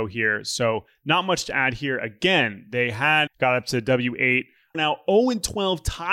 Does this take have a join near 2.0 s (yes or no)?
no